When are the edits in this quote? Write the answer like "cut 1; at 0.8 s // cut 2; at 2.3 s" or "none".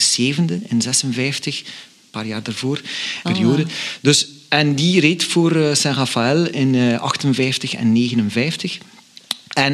cut 1; at 3.2 s